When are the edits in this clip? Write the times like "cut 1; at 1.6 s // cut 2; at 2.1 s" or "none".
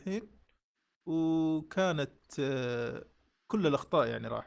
none